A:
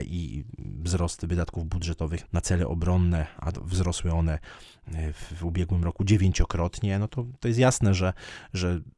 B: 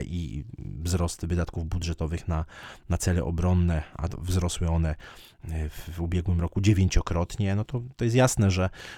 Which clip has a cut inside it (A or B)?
A